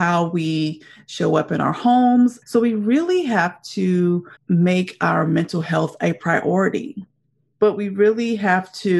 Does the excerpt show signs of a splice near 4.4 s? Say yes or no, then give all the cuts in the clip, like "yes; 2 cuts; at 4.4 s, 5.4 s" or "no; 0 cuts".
yes; 3 cuts; at 2.4 s, 4.4 s, 7.5 s